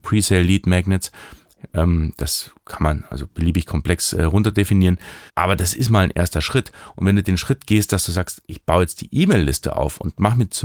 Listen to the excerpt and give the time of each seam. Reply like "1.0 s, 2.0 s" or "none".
5.3 s